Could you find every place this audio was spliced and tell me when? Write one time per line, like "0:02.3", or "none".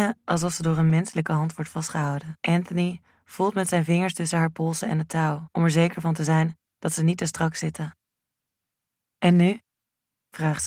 0:02.4
0:05.5